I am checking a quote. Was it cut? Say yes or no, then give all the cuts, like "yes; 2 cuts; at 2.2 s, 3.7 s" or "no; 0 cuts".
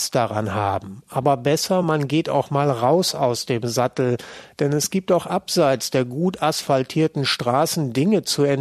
no; 0 cuts